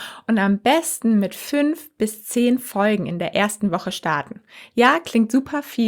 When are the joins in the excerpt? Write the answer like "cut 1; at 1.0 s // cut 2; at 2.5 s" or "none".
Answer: none